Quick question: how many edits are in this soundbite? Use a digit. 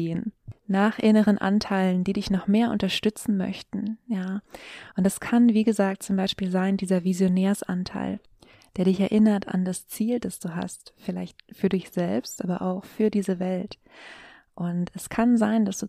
0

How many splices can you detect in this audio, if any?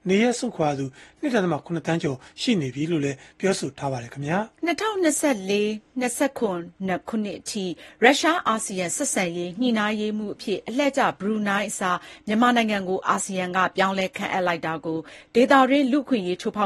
1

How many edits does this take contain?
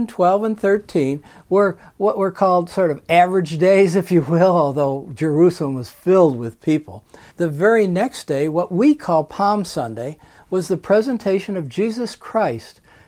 1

